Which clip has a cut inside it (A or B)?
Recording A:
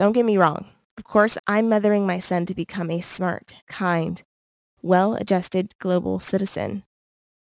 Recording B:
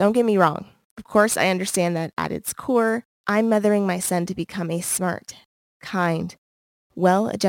A